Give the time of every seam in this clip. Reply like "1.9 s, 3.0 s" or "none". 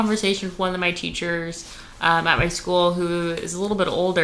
none